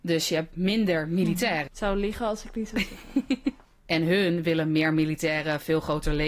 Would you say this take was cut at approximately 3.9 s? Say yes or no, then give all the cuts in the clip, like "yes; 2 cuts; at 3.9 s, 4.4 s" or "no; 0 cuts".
yes; 2 cuts; at 1.7 s, 3.9 s